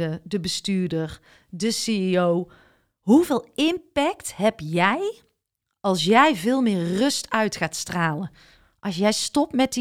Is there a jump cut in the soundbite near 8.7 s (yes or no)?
no